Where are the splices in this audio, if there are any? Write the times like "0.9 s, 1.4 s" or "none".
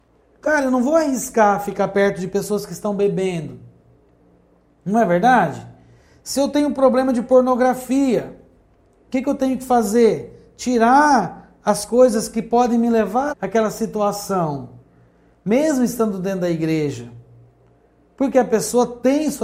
13.3 s